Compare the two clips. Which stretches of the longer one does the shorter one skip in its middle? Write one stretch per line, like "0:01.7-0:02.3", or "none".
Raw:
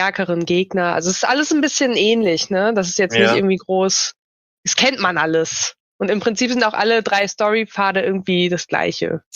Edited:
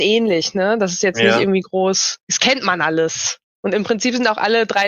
0:04.2-0:04.6